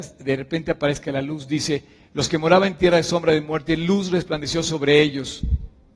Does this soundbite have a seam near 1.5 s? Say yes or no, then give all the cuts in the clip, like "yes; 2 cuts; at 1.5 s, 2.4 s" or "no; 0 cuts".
no; 0 cuts